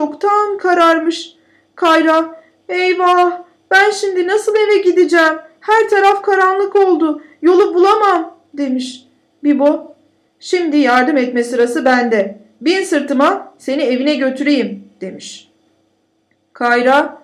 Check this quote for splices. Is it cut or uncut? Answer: uncut